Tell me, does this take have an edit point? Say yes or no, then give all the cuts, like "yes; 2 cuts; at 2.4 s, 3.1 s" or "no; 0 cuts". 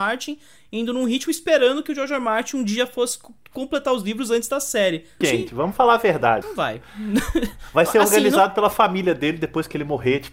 yes; 2 cuts; at 5.2 s, 6.4 s